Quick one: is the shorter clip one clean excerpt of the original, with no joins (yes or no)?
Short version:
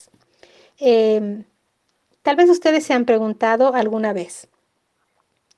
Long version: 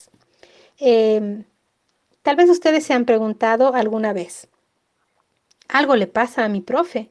yes